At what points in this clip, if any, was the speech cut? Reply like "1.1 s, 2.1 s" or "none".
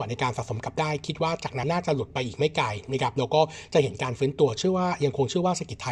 1.6 s